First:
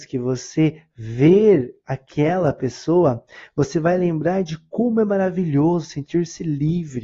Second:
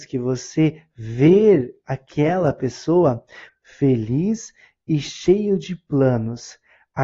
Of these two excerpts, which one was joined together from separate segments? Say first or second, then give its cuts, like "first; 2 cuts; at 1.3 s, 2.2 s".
second; 1 cut; at 3.5 s